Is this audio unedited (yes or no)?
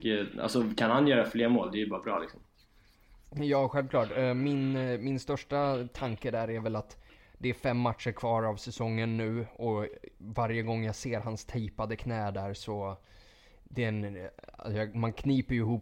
yes